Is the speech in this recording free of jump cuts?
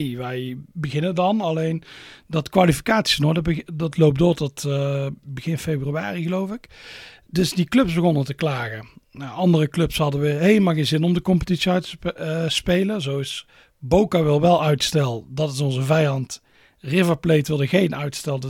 yes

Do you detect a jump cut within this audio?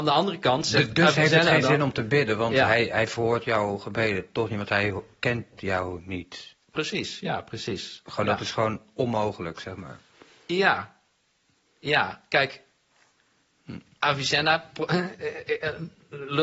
no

